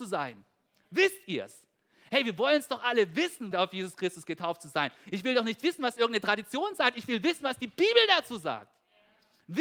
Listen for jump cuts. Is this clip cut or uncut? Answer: cut